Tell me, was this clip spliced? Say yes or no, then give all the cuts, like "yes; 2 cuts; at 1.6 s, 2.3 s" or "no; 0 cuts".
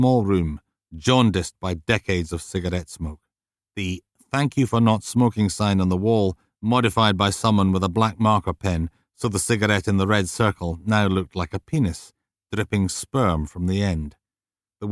no; 0 cuts